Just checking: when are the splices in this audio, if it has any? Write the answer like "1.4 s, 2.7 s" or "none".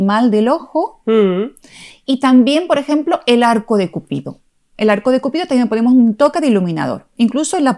none